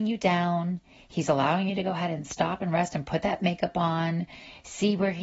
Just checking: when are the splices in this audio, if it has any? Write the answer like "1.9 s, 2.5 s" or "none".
none